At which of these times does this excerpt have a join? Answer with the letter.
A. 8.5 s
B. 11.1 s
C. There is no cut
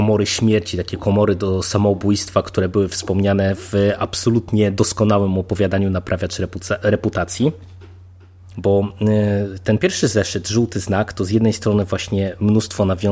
A